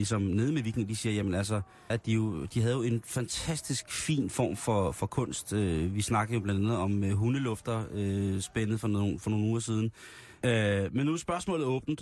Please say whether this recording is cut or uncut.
cut